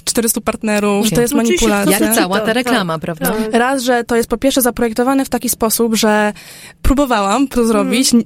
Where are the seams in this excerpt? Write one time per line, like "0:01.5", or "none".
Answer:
0:01.0